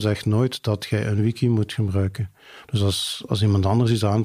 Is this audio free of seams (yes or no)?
no